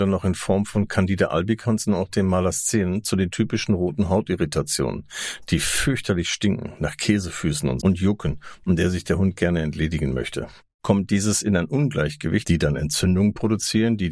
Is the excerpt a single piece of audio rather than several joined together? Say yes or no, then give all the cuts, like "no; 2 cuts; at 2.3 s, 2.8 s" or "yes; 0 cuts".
no; 3 cuts; at 7.8 s, 10.7 s, 12.4 s